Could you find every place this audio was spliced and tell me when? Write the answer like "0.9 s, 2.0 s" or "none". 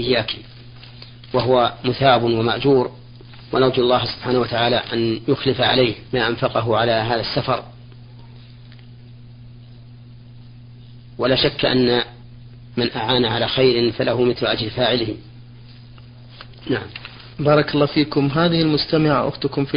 6.1 s, 17.3 s